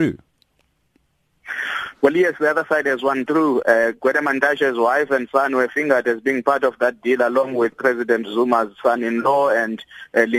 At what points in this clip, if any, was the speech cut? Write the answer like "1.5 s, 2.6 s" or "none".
3.6 s, 7.7 s